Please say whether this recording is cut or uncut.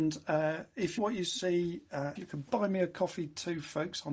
cut